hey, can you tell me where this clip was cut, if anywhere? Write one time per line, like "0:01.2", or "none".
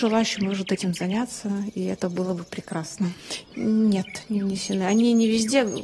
0:03.4